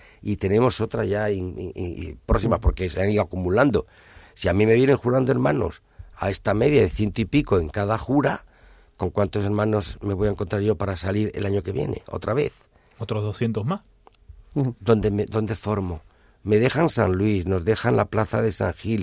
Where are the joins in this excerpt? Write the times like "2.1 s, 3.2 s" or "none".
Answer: none